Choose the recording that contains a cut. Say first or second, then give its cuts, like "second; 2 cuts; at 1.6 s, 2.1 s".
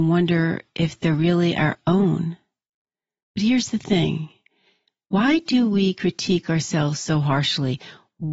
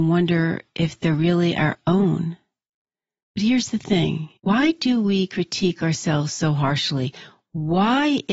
second; 1 cut; at 4.4 s